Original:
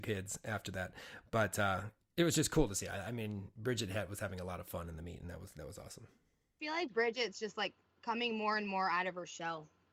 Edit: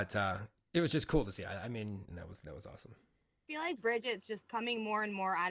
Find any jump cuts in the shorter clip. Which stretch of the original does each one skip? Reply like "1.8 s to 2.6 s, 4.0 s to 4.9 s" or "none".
3.5 s to 5.2 s, 7.5 s to 8.0 s